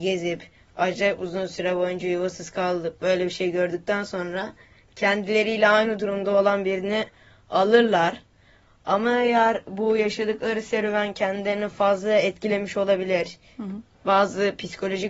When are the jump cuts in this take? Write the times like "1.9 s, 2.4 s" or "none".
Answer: none